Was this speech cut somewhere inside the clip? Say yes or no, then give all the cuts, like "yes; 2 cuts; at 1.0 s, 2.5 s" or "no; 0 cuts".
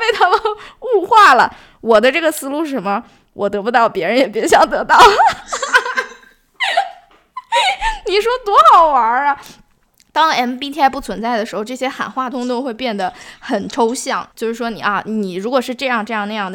yes; 2 cuts; at 12.3 s, 14.3 s